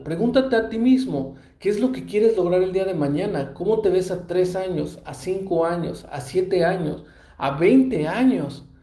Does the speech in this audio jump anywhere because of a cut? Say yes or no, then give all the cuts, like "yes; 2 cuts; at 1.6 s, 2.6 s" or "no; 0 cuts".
no; 0 cuts